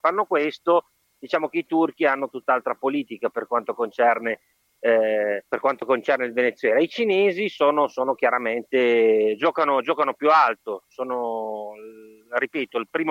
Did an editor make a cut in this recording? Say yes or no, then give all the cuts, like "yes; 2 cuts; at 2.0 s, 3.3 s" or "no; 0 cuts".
yes; 1 cut; at 5.4 s